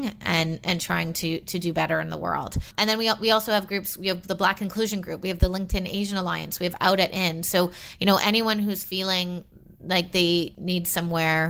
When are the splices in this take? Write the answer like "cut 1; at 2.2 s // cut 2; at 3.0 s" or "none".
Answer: none